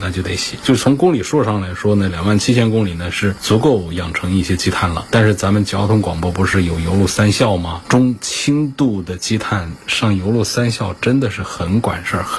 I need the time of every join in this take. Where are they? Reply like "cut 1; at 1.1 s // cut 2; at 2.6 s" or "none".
none